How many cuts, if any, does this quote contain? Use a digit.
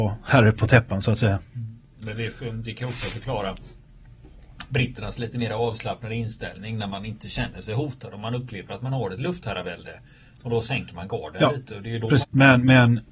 1